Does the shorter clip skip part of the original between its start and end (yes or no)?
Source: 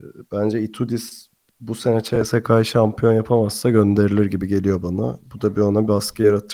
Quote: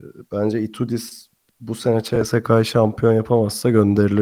no